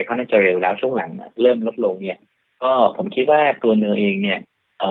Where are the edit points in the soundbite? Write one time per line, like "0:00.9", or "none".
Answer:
none